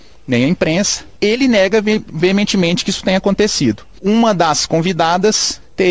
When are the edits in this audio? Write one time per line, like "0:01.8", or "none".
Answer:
0:01.2
0:04.0